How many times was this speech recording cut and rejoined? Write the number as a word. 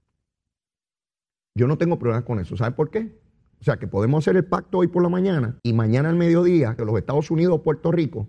three